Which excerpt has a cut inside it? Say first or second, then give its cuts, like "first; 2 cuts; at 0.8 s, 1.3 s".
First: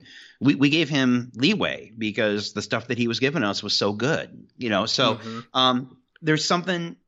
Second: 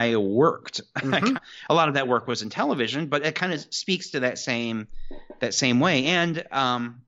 second; 1 cut; at 1.3 s